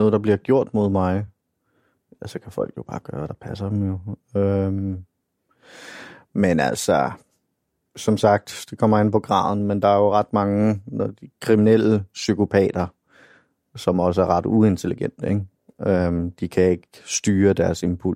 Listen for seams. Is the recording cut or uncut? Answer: uncut